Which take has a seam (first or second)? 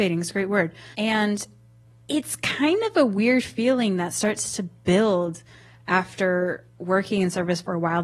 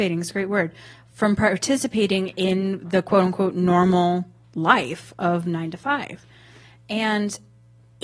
first